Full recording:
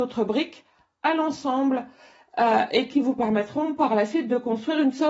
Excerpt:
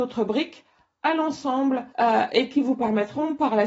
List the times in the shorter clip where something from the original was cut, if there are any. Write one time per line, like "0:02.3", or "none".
0:01.9